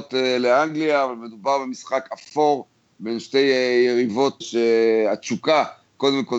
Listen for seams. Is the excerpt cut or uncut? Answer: cut